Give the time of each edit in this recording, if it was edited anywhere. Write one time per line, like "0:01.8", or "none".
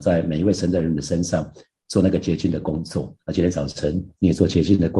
0:03.2